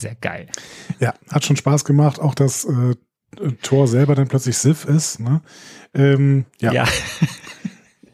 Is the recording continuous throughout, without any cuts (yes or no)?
yes